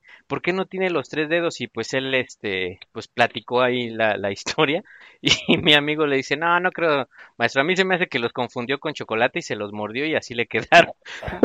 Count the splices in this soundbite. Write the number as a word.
zero